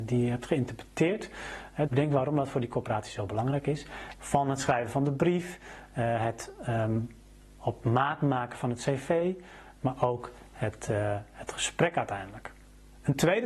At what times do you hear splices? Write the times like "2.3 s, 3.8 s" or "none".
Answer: 1.9 s, 4.2 s